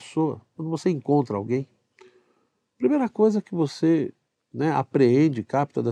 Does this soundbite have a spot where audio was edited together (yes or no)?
no